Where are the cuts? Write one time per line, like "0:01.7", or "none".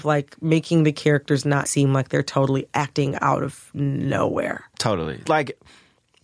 0:01.7
0:05.3